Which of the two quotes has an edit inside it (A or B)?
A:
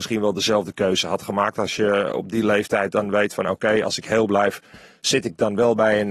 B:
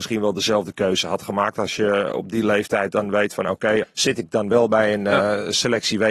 B